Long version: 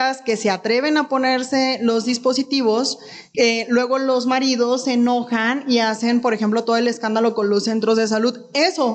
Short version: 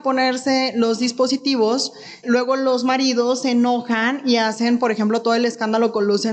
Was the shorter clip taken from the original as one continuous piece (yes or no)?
no